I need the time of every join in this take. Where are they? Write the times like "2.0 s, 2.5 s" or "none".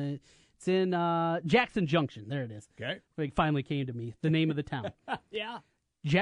none